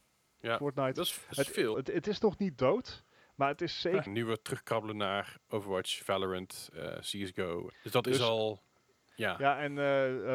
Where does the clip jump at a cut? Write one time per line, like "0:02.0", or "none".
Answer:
0:01.7
0:04.1
0:07.7